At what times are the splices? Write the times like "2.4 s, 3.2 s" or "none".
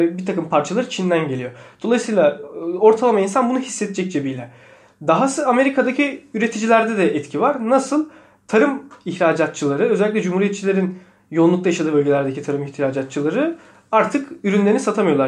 none